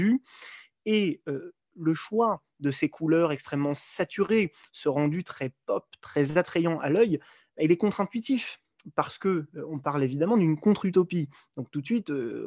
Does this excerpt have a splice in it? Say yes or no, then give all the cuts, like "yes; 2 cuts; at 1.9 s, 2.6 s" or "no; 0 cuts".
no; 0 cuts